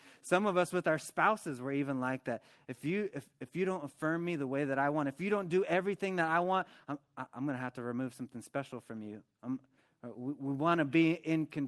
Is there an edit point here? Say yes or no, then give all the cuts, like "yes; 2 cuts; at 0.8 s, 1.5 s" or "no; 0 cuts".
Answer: no; 0 cuts